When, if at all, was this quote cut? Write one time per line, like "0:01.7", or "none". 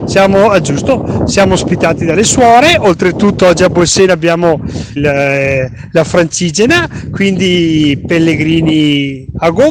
0:05.0